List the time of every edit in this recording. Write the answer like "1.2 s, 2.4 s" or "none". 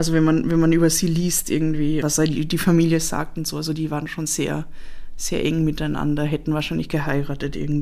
2.0 s